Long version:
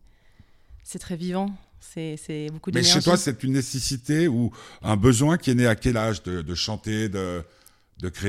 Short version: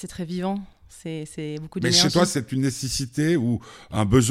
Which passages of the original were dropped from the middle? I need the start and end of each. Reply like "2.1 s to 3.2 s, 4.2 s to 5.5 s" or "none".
none